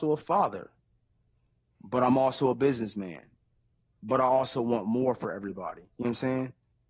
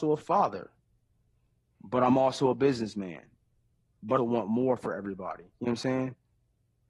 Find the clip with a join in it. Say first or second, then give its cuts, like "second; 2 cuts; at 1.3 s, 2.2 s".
second; 1 cut; at 4.2 s